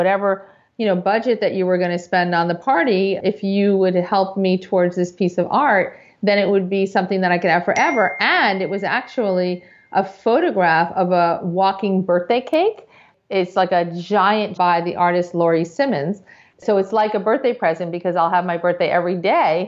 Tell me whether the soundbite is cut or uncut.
cut